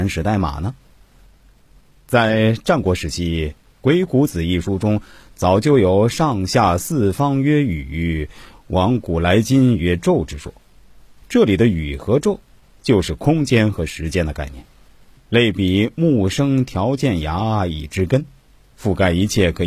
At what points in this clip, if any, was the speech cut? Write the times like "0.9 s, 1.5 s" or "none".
15.2 s